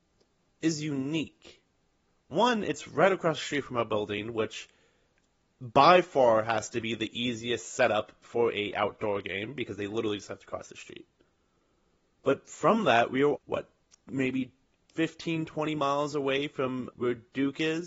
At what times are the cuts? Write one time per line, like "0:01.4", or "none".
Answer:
0:13.4
0:16.9